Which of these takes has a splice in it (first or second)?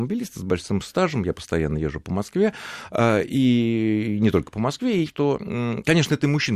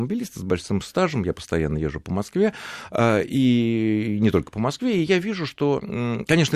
first